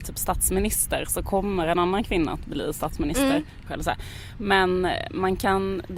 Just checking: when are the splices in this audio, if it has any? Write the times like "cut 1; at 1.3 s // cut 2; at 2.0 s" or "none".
cut 1; at 3.7 s